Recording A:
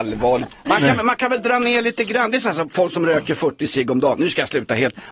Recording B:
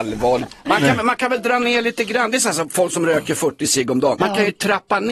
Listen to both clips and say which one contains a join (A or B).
B